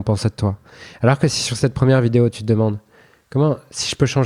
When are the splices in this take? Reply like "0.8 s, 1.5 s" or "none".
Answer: none